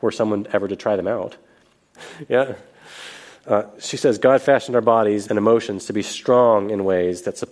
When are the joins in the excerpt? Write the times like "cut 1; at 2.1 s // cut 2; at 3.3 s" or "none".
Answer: cut 1; at 2.0 s // cut 2; at 5.3 s

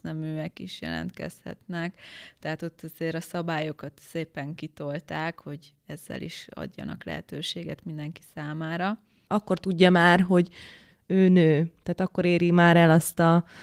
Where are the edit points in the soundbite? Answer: cut 1; at 9.3 s

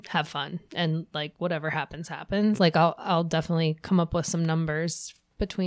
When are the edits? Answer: cut 1; at 2.6 s

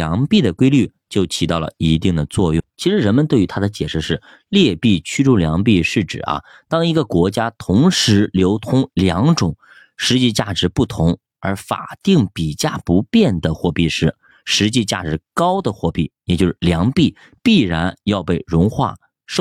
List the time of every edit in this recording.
cut 1; at 2.7 s

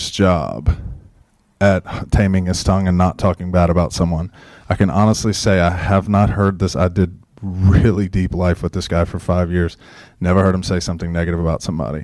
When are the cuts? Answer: none

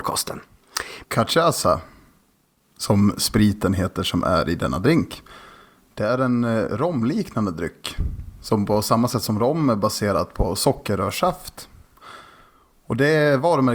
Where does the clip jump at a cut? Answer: cut 1; at 1.0 s

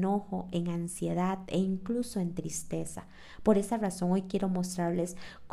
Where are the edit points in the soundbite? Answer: none

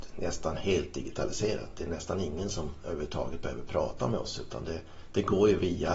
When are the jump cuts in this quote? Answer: none

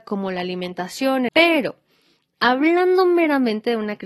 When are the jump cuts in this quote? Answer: cut 1; at 1.3 s

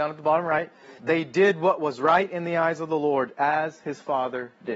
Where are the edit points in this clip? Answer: cut 1; at 1.0 s

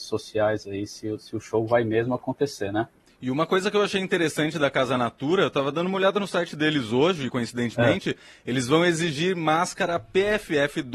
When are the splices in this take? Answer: none

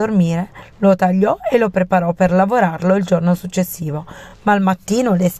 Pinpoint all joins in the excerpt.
none

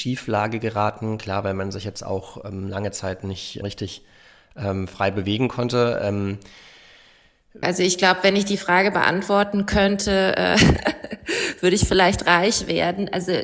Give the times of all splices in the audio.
cut 1; at 3.6 s // cut 2; at 7.6 s

